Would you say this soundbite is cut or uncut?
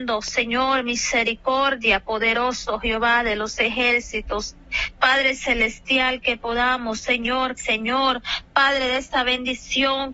cut